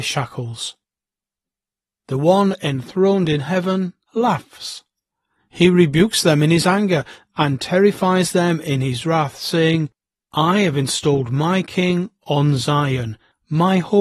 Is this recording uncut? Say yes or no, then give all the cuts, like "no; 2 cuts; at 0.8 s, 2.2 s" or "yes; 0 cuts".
no; 1 cut; at 5.4 s